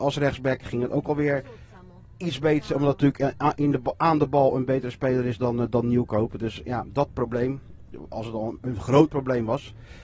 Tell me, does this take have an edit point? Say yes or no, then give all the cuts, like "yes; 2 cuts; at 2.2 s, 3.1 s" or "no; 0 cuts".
no; 0 cuts